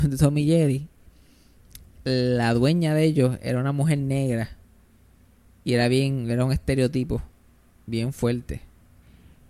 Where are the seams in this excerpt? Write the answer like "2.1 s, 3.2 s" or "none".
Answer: none